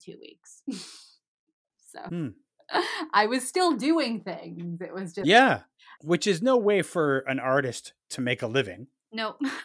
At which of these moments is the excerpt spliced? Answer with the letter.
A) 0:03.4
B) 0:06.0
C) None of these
B